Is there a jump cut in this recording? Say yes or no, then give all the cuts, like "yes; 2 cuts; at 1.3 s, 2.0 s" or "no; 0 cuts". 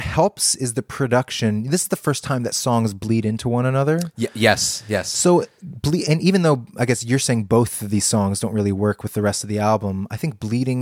no; 0 cuts